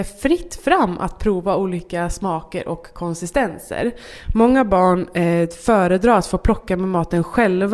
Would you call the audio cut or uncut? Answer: uncut